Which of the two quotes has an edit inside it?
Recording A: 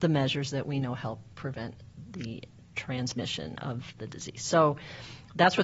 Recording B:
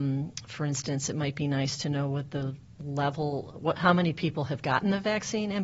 B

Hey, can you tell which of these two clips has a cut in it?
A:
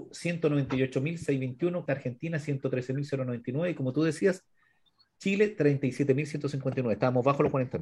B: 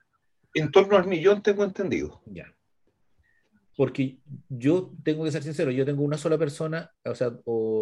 A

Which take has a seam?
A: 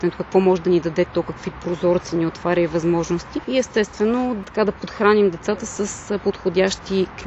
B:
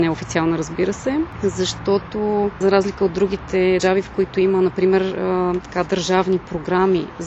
B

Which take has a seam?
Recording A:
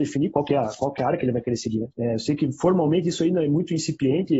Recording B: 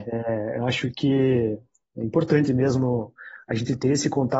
A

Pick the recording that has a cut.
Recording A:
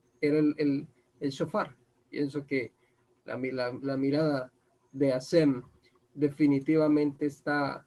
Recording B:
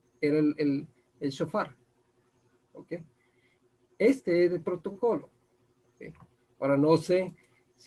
A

